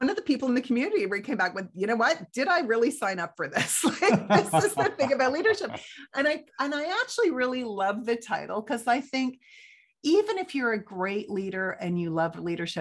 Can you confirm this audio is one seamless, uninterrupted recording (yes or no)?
yes